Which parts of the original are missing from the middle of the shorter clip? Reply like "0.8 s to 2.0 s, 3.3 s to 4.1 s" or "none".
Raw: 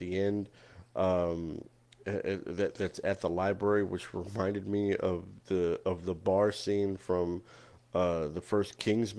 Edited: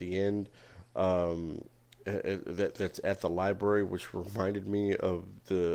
none